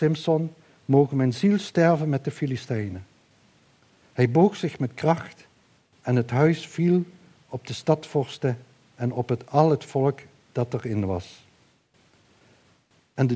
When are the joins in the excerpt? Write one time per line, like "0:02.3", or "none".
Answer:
none